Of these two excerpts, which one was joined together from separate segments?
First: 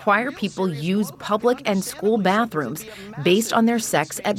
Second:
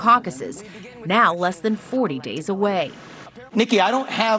second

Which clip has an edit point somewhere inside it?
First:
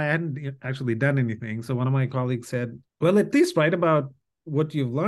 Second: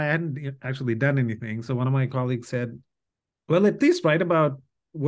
first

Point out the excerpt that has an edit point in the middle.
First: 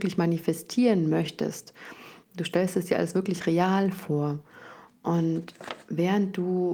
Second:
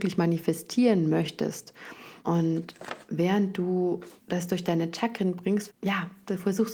second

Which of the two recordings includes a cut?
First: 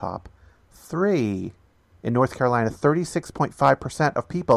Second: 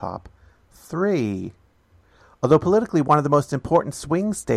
first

